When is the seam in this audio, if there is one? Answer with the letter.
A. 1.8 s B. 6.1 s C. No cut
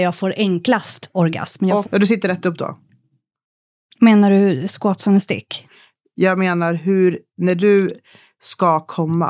A